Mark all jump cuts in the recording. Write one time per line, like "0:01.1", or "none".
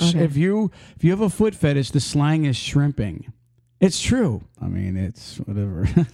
0:04.6